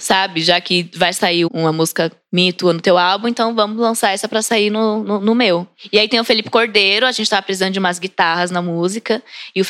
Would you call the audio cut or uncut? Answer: cut